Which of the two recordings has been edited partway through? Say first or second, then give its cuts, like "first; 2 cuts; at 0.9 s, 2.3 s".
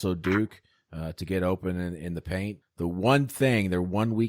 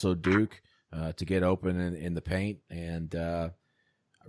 first; 1 cut; at 2.6 s